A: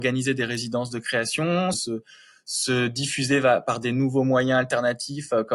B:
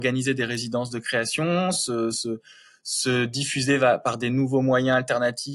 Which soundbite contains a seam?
A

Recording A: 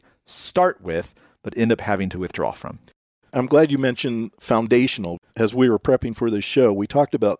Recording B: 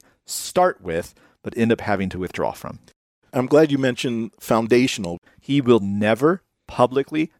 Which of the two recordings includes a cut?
B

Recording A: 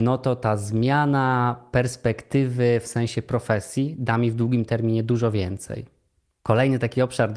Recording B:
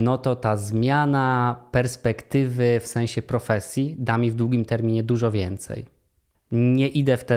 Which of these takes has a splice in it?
B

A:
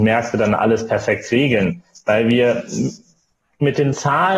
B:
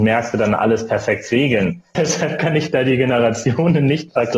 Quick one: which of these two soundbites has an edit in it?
B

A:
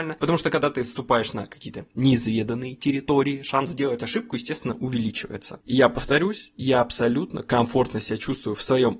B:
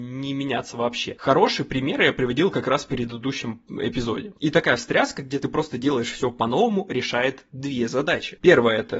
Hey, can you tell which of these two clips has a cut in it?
B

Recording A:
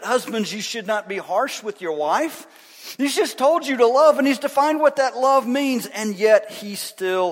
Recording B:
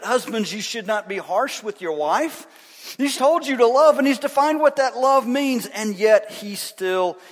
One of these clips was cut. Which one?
B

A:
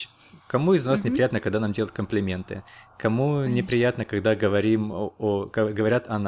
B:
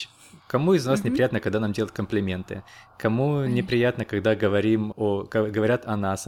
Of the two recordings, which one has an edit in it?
B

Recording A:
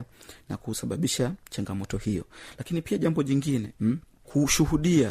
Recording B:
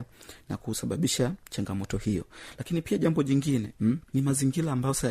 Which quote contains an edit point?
B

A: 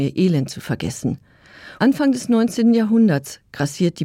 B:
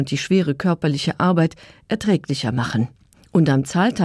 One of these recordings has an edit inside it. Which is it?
A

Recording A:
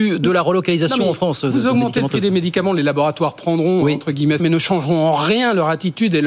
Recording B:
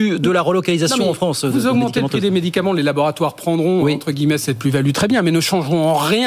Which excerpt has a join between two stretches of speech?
A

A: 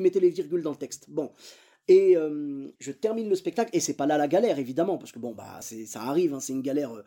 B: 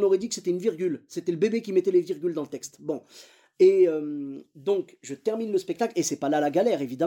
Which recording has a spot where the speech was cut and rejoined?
A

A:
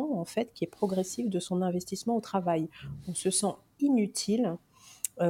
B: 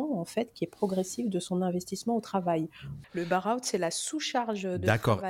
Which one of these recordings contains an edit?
B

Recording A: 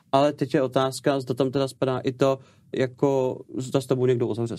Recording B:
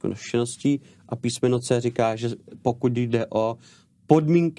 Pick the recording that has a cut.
A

